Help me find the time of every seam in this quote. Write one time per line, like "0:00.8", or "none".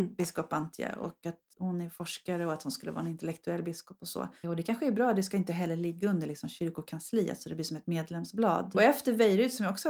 0:01.5
0:04.4
0:08.7